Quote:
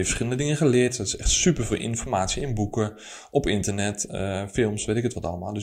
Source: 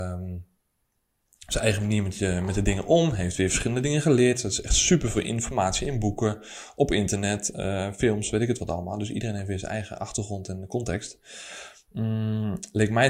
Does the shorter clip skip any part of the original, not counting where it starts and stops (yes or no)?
no